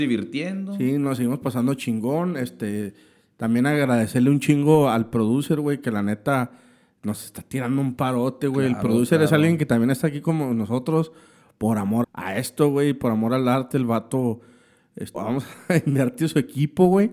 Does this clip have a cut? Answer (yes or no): yes